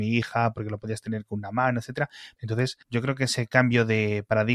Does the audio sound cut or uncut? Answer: cut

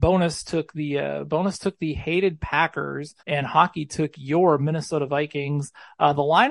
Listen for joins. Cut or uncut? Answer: cut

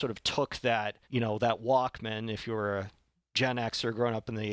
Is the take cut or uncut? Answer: cut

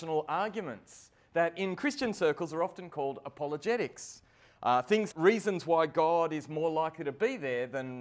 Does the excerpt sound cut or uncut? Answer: cut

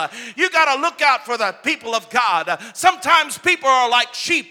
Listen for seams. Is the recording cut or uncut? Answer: uncut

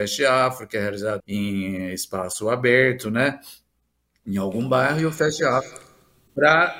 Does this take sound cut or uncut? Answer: cut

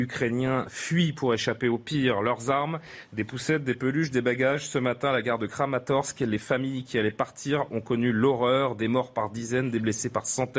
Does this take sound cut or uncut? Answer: uncut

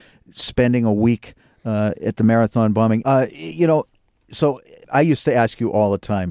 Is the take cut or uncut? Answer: cut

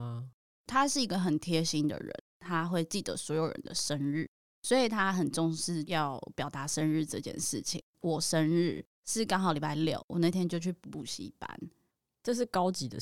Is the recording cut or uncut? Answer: uncut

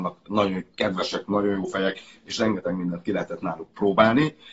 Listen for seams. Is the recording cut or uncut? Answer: uncut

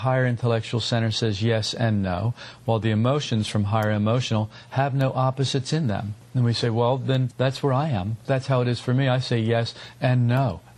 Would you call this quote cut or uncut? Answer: uncut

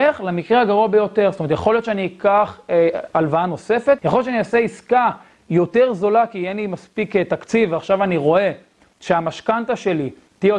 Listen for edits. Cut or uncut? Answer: cut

